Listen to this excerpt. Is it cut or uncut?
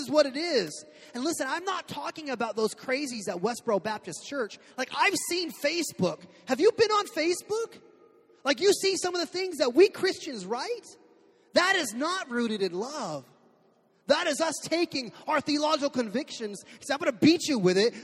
uncut